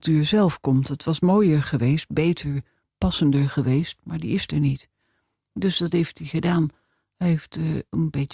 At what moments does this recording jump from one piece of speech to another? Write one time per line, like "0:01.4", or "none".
none